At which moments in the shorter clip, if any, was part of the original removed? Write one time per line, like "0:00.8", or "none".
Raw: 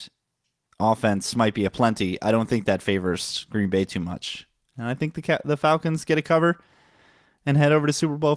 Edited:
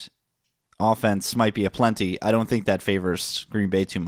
none